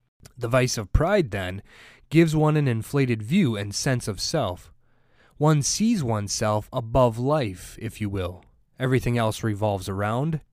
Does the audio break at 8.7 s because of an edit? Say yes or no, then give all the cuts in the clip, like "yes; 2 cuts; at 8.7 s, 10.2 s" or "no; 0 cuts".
no; 0 cuts